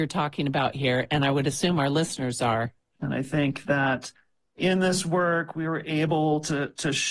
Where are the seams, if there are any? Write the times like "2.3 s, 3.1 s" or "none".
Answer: 3.0 s